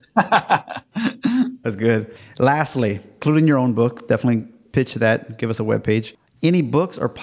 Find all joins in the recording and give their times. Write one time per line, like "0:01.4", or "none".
0:01.6

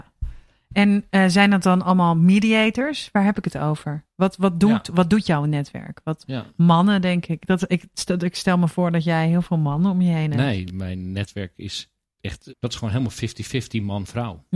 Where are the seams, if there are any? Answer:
0:06.2
0:12.5

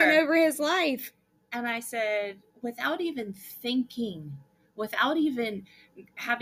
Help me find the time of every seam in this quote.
0:02.5

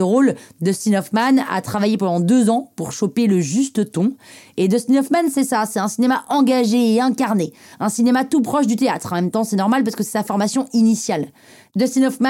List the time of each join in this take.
none

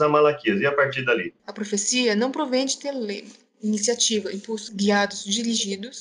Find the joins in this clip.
0:01.4
0:04.7

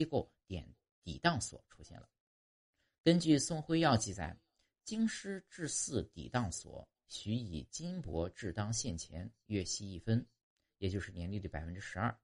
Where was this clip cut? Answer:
none

